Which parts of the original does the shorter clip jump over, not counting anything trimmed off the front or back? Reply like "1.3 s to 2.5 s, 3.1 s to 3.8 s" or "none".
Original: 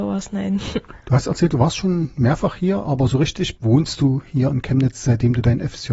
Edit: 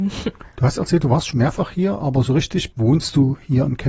1.8 s to 2.1 s

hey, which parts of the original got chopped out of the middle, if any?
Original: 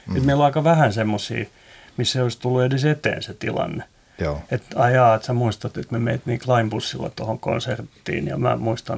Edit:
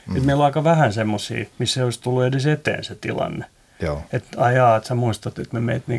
1.5 s to 1.9 s

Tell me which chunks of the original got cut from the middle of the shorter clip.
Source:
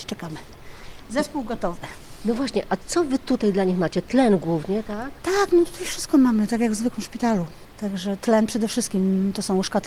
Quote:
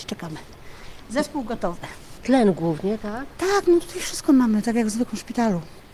2.2 s to 4.0 s

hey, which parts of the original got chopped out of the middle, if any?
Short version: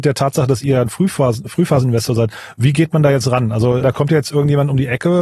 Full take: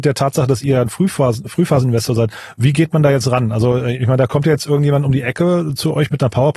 3.8 s to 4.2 s

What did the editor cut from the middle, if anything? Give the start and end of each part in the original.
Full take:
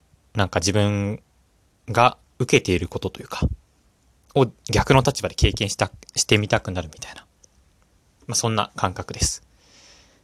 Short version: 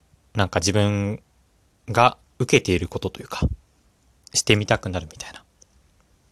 4.2 s to 6.1 s

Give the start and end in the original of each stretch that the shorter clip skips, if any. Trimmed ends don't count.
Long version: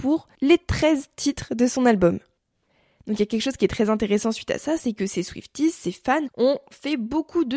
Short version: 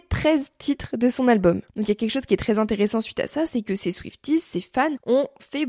2.3 s to 3.0 s

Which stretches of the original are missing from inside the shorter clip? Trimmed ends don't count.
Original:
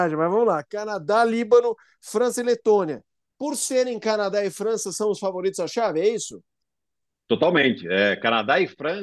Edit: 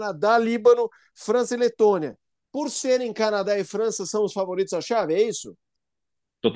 none

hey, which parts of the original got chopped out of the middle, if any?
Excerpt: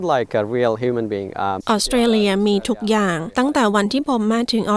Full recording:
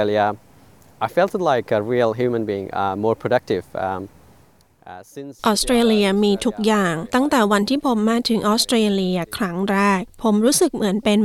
3.0 s to 5.4 s

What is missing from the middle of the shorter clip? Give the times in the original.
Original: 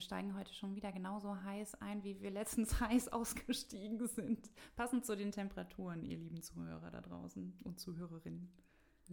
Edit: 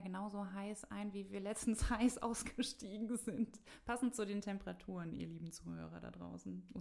none

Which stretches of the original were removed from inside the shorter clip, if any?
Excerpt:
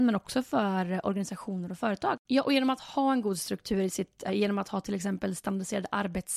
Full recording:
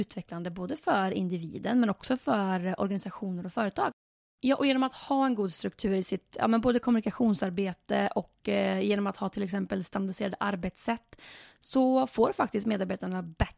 4.0 s to 4.4 s, 6.4 s to 8.7 s

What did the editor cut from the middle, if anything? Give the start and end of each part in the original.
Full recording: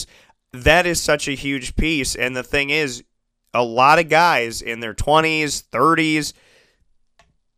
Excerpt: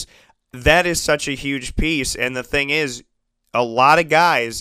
none

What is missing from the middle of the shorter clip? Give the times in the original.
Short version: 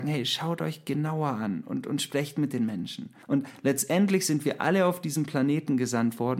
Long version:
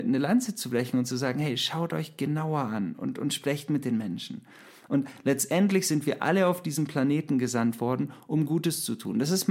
4.5 s to 4.8 s

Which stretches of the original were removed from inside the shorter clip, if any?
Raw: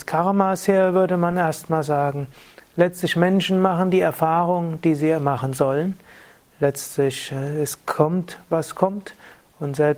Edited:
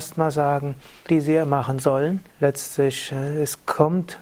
2.6 s to 4.8 s, 6.1 s to 6.5 s

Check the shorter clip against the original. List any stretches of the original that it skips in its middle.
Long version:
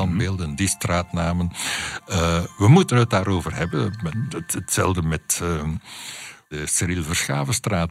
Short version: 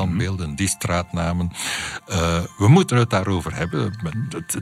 none

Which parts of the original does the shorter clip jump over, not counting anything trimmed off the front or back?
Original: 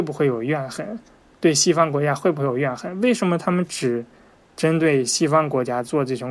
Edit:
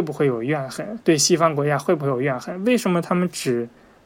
1.0 s to 1.4 s

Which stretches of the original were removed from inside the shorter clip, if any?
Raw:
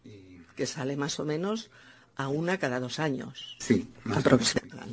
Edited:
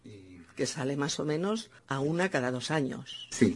1.8 s to 2.1 s

